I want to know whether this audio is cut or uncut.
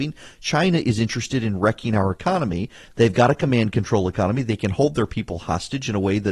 uncut